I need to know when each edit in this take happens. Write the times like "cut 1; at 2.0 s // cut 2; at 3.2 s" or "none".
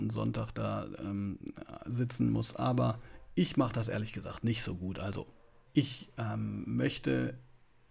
cut 1; at 5.7 s